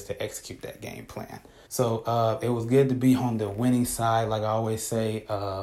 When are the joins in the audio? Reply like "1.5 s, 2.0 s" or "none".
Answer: 1.7 s